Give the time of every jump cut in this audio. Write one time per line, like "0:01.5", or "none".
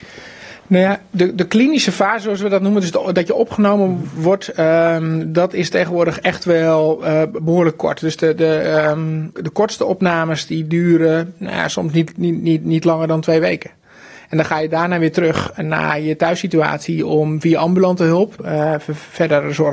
0:09.3
0:18.4

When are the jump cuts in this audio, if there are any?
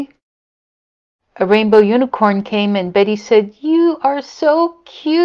none

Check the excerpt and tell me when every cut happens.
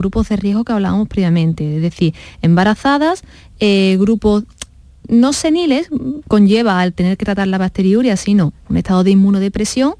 0:06.2

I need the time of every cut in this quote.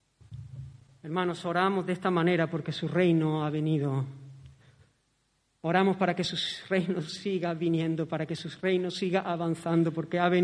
none

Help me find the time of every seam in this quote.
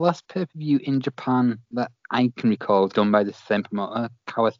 0:02.9

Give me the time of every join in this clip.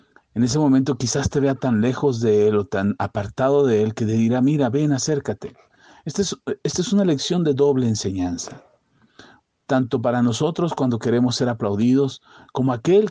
none

